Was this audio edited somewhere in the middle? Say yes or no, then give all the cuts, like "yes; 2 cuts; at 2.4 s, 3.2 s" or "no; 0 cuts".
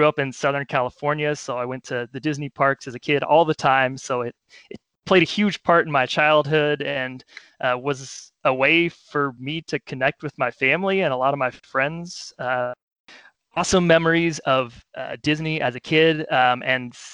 no; 0 cuts